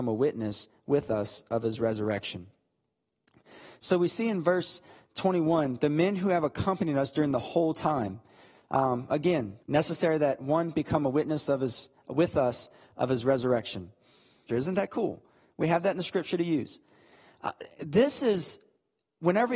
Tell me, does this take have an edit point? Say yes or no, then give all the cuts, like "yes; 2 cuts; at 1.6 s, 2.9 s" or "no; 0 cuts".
yes; 2 cuts; at 9.6 s, 14.5 s